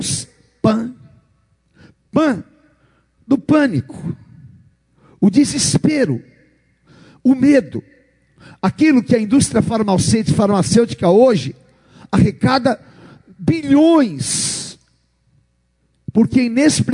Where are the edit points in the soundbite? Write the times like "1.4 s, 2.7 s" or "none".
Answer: none